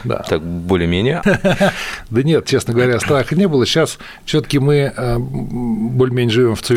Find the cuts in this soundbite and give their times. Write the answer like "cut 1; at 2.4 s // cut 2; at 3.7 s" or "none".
cut 1; at 1.2 s